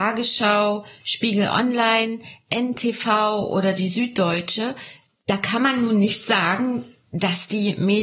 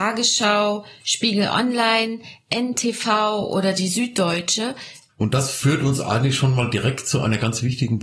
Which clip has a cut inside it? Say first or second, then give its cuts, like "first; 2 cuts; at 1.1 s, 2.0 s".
second; 1 cut; at 5.1 s